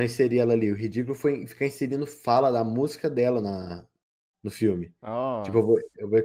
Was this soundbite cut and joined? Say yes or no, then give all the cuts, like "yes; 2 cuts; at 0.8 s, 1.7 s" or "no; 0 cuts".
no; 0 cuts